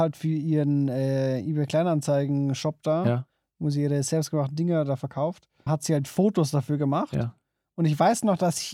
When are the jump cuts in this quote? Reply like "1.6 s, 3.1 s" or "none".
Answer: 5.7 s